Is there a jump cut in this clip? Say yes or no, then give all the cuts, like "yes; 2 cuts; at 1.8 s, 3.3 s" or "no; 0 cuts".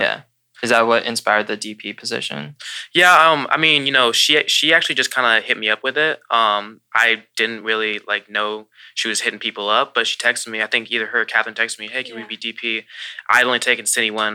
no; 0 cuts